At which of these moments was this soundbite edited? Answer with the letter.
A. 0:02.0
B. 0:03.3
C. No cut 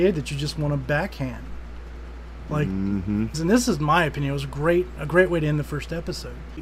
B